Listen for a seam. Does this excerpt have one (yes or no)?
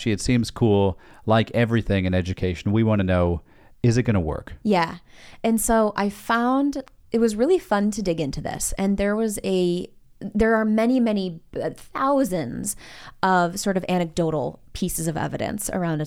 no